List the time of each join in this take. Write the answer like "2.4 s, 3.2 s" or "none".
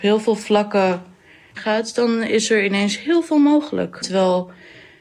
1.6 s, 4.0 s